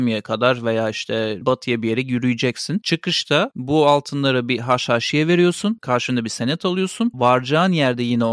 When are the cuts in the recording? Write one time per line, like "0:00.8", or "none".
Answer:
none